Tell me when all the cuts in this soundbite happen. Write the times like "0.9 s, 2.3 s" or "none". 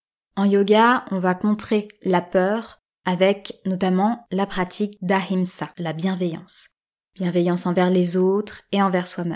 5.7 s